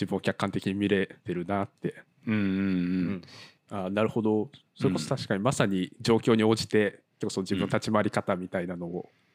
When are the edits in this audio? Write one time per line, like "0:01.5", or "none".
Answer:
0:01.2
0:03.7